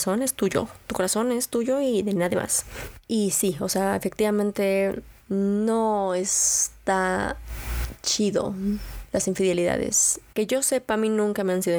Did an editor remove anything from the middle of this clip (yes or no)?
yes